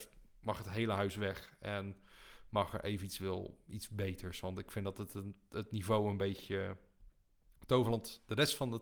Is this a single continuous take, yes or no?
yes